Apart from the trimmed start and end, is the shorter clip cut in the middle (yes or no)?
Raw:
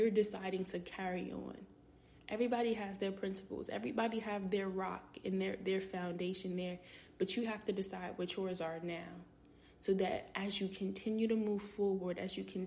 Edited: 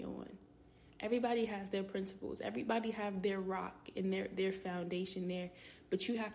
no